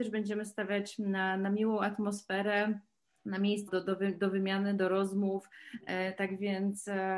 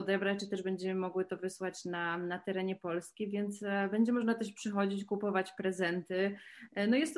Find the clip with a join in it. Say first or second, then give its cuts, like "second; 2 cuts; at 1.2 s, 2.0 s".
first; 1 cut; at 3.7 s